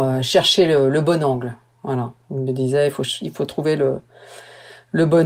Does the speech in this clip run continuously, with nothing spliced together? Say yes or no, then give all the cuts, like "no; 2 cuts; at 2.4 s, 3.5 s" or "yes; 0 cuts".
yes; 0 cuts